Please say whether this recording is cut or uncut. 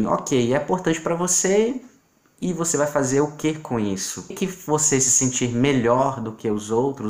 cut